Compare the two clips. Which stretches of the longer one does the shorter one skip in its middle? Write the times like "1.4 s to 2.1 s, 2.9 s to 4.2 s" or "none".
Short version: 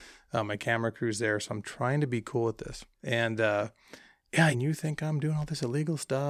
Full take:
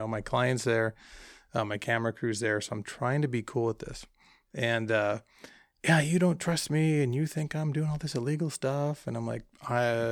4.1 s to 4.4 s, 6.0 s to 7.0 s

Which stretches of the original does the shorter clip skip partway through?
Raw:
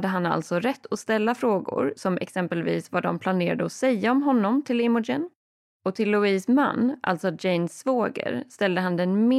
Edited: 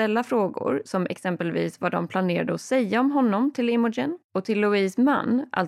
5.4 s to 5.7 s

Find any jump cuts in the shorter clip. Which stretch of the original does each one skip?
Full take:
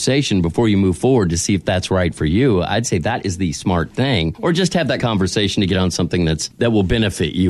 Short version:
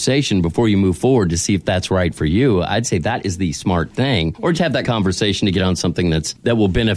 4.5 s to 4.7 s

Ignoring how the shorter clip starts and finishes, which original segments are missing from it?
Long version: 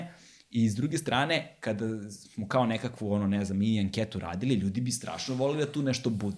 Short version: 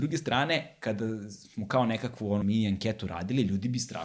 3.2 s to 3.5 s

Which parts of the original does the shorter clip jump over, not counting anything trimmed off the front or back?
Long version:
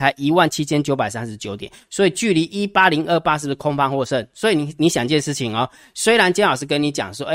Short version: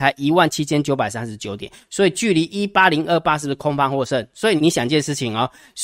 4.6 s to 4.8 s

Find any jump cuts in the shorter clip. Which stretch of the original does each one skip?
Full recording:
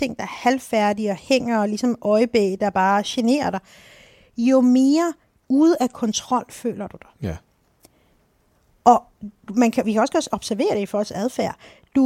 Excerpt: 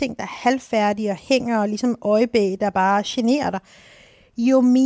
none

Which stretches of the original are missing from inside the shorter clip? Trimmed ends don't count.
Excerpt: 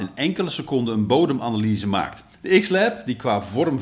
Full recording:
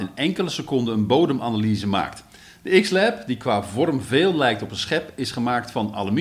2.3 s to 2.5 s

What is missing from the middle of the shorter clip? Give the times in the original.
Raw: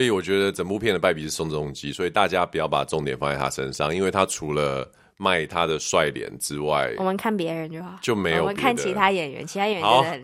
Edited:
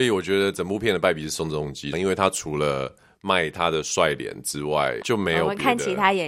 1.9 s to 3.9 s, 7.0 s to 8.0 s

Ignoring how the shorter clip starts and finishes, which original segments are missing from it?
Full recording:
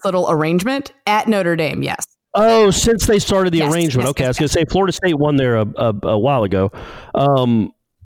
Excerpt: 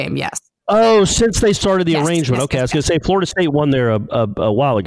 none

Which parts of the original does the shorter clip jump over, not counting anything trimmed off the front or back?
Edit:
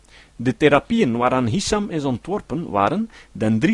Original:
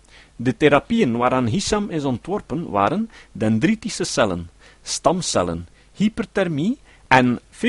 none

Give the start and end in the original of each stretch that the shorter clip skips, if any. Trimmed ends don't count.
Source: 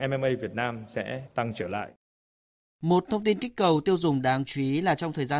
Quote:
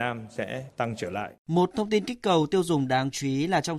2.0 s to 2.7 s

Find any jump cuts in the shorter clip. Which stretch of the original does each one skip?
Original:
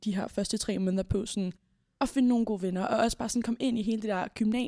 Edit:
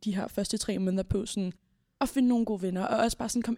none

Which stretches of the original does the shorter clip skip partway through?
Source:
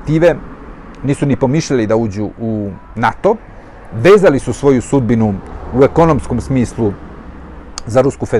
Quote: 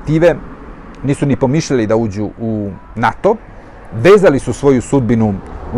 none

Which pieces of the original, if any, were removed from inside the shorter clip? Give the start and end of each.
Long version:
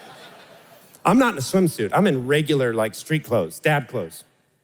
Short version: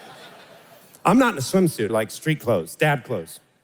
1.9 s to 2.7 s

